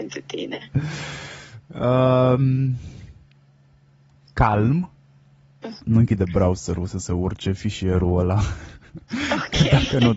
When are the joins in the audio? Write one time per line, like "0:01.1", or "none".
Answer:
0:05.8